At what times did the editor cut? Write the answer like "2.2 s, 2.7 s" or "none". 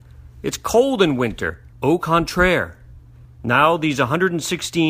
1.7 s, 3.2 s

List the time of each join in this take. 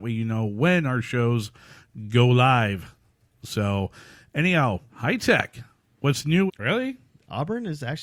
4.9 s, 6.5 s

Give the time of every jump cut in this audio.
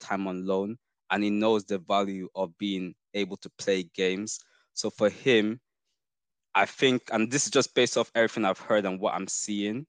none

